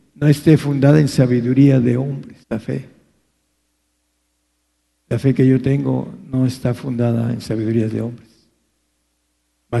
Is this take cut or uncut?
cut